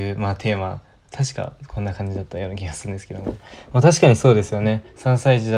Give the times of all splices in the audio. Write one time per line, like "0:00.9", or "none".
none

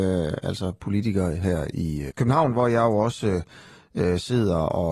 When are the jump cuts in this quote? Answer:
0:02.1

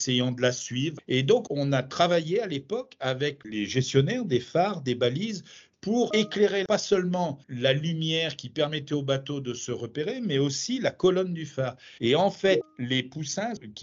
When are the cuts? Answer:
0:12.0

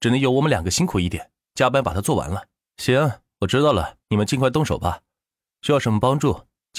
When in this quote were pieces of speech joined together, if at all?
0:02.7
0:04.0

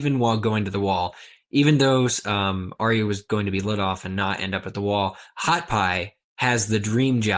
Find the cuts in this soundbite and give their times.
none

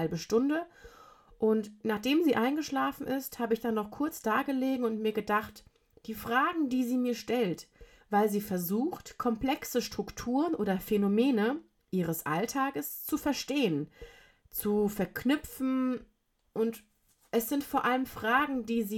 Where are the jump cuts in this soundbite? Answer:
0:08.0

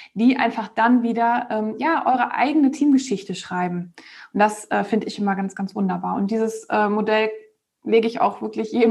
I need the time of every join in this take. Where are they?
none

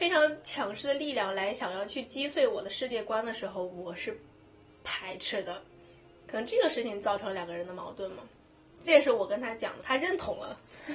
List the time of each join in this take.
0:09.8

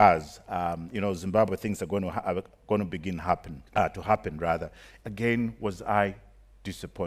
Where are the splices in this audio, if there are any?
0:03.7
0:05.0

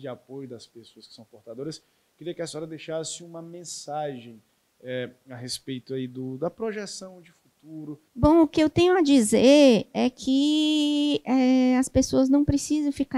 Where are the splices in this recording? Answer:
0:08.1

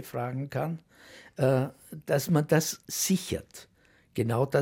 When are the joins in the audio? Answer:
0:02.8

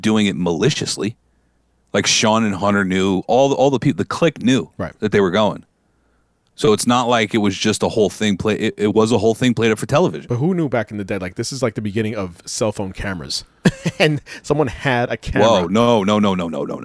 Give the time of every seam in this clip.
none

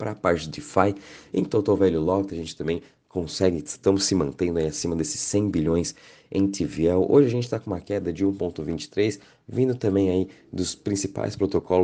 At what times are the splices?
none

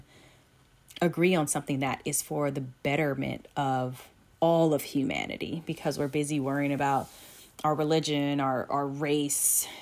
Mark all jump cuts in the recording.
0:08.7

